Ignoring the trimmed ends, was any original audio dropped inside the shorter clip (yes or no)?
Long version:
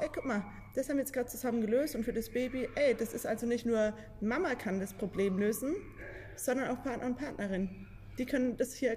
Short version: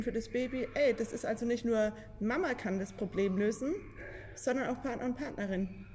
no